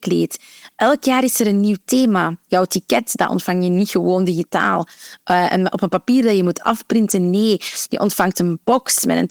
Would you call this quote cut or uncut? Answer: uncut